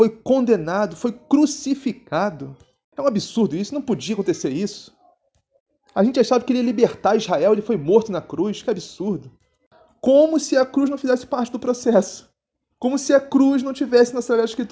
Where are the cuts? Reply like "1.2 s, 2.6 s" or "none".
none